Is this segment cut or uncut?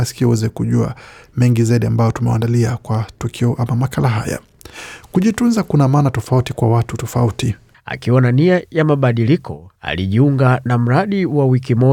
cut